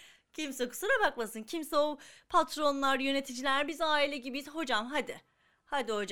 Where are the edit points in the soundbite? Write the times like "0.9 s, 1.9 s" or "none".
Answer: none